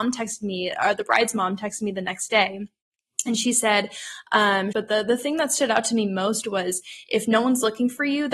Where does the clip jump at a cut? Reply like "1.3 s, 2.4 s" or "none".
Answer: 4.7 s